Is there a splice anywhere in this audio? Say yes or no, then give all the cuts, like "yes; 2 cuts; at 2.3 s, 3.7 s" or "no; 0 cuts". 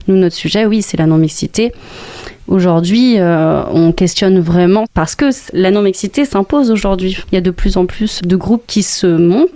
no; 0 cuts